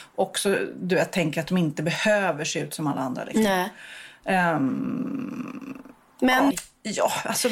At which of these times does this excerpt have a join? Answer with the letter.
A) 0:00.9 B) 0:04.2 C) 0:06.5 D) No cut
C